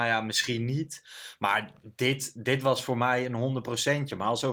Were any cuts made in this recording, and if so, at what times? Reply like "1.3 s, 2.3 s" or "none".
none